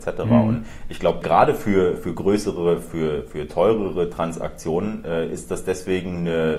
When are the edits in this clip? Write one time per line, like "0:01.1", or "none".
none